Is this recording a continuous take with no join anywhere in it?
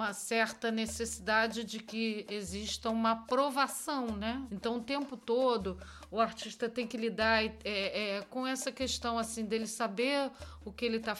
no; 1 cut; at 4.5 s

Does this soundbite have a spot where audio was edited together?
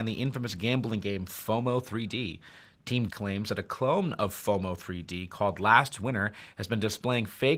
yes; 1 cut; at 3.1 s

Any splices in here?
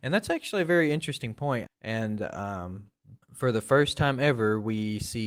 yes; 2 cuts; at 1.7 s, 3.2 s

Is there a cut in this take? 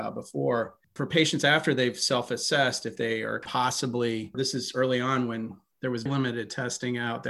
yes; 2 cuts; at 4.3 s, 6.1 s

